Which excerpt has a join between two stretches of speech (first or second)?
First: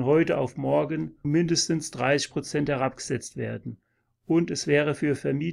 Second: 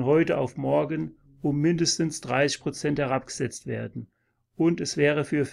first